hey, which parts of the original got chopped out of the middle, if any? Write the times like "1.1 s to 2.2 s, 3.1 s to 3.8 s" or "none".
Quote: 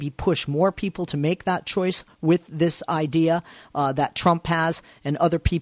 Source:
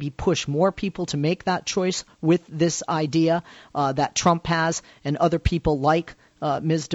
none